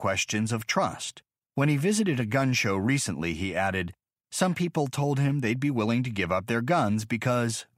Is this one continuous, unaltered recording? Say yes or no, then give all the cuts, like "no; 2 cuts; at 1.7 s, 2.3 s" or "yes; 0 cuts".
no; 1 cut; at 1.4 s